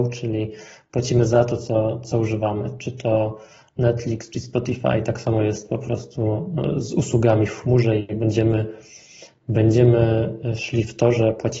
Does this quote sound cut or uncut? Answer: uncut